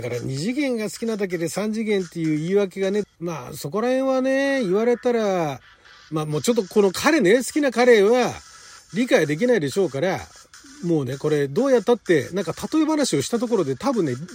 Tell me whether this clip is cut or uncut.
cut